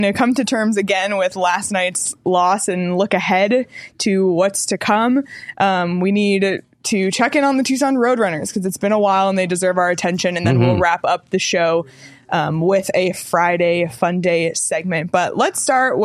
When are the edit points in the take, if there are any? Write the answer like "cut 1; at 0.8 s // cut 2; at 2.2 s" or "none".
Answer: none